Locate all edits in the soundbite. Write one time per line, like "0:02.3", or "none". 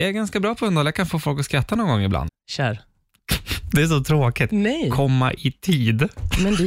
0:02.3